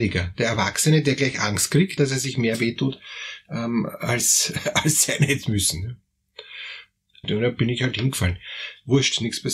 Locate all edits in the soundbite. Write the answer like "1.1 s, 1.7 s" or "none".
2.0 s, 7.2 s